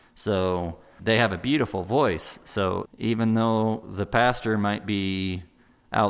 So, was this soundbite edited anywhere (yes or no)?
yes